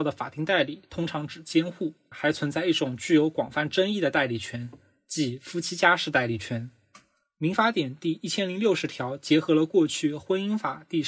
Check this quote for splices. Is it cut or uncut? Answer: cut